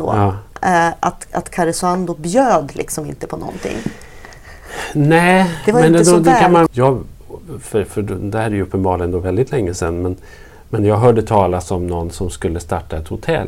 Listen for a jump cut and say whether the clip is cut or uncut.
cut